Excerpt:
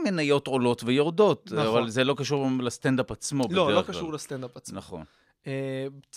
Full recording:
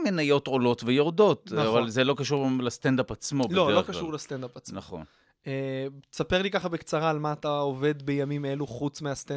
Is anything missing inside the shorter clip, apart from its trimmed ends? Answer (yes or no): no